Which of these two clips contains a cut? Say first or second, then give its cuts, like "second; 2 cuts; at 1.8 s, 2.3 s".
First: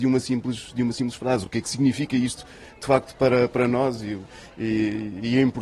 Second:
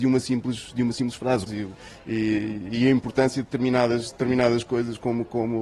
second; 1 cut; at 1.5 s